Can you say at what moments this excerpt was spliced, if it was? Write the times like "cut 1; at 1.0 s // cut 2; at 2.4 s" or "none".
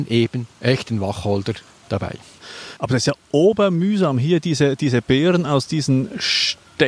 cut 1; at 2.8 s